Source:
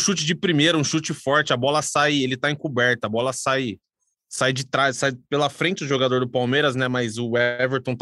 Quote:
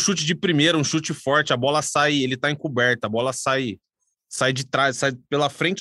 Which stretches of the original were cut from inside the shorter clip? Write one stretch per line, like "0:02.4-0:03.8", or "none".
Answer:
none

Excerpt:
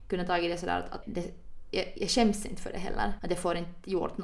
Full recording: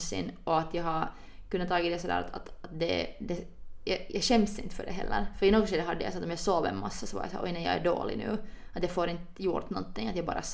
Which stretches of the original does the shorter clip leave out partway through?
0:02.4-0:03.2
0:05.3-0:08.7

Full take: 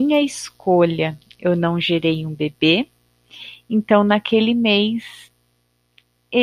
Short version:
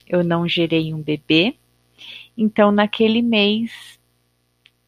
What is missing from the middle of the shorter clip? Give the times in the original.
none

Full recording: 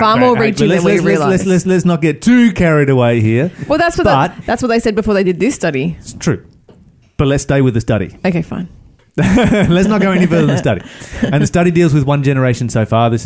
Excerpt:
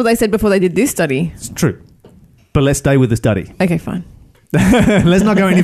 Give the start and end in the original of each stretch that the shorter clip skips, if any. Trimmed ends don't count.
none

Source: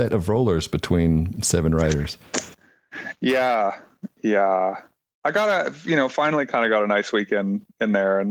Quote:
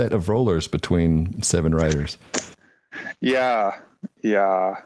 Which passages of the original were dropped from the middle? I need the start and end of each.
none

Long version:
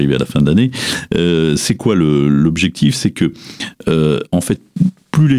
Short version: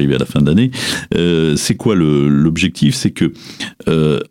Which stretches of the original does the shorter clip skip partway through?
none

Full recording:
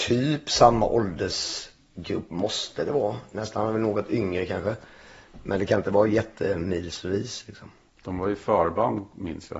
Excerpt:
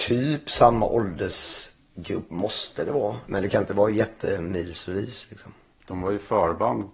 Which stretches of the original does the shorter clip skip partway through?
0:03.3-0:05.4

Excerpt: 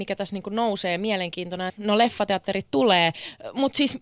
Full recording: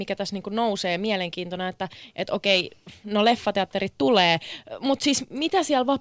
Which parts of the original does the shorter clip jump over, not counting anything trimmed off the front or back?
0:01.7-0:03.0

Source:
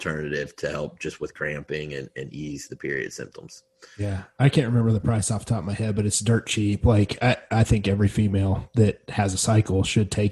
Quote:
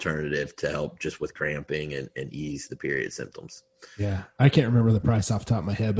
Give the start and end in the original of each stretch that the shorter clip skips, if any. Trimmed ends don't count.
none

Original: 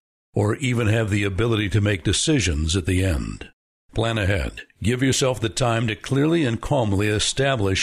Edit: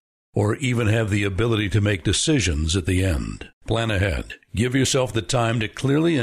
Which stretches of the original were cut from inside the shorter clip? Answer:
0:03.5-0:03.8

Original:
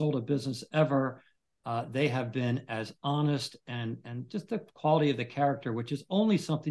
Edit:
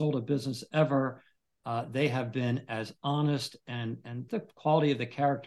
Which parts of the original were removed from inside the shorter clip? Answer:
0:04.3-0:04.5

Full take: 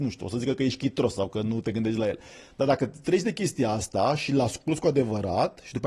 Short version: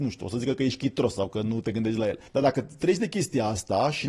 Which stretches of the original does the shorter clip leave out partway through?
0:02.3-0:02.5

